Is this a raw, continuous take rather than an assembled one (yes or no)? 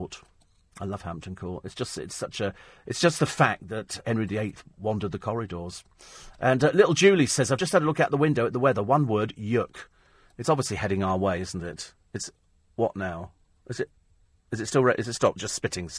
yes